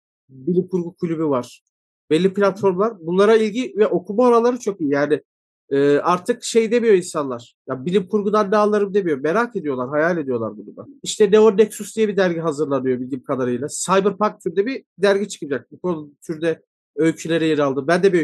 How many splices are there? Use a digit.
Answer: 1